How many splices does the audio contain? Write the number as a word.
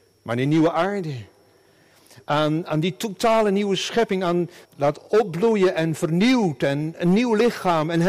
one